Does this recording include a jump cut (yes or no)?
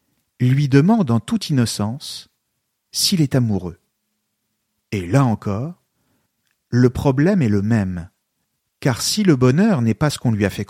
no